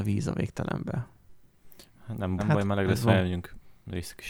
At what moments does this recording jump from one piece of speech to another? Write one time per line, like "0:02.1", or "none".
0:02.4